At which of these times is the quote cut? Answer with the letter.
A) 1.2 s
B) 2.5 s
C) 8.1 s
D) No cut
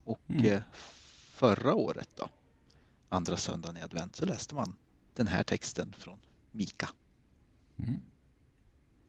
D